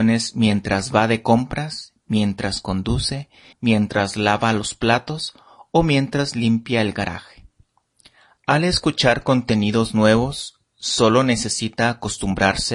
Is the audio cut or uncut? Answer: cut